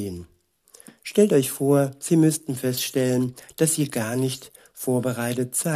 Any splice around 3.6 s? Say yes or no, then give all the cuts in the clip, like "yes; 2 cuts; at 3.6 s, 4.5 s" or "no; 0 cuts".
no; 1 cut; at 1.0 s